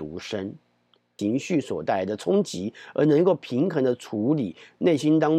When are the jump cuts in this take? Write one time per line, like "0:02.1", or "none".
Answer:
0:01.2